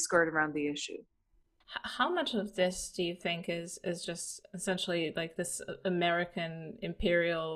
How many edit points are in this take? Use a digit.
1